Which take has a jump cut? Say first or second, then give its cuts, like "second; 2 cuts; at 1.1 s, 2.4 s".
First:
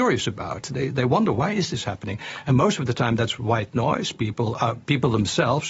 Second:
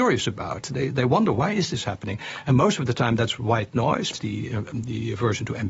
second; 1 cut; at 4.1 s